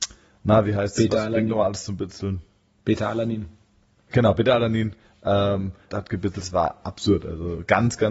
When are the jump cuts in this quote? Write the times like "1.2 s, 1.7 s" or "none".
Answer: 5.9 s